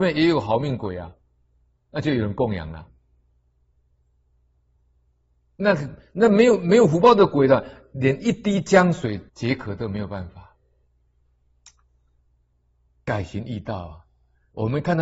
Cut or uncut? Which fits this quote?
cut